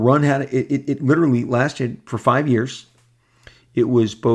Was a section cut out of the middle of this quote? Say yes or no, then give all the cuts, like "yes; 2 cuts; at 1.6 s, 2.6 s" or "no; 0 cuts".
no; 0 cuts